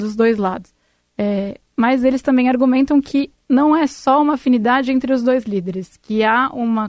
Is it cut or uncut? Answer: uncut